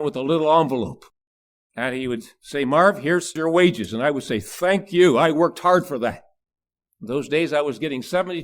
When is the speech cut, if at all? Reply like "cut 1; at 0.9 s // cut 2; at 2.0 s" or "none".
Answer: none